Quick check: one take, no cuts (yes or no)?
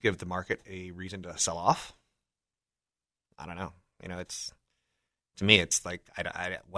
yes